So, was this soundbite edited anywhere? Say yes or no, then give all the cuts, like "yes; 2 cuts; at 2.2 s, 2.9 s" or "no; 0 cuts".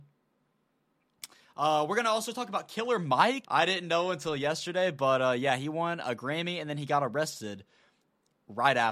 yes; 1 cut; at 3.4 s